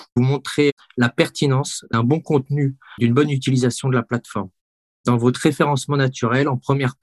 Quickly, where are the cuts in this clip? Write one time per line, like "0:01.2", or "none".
none

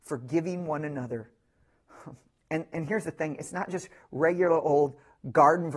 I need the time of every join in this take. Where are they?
none

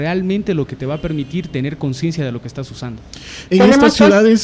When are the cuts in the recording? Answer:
0:03.5

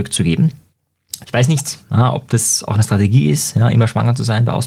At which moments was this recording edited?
0:01.2

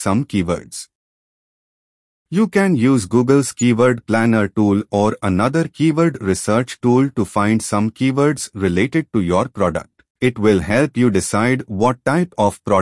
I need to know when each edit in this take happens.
0:10.1

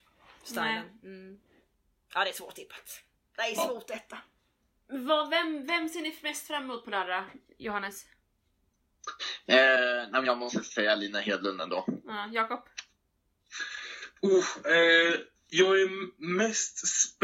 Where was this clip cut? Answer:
none

